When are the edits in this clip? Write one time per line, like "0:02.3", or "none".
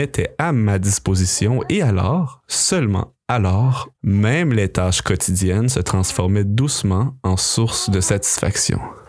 0:03.9